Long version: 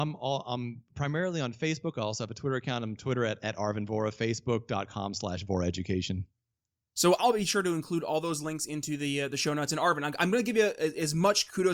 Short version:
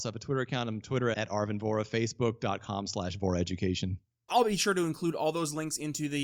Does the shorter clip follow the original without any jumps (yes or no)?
no